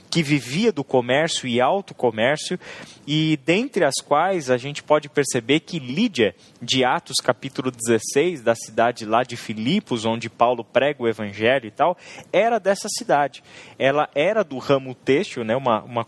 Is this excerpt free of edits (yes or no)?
yes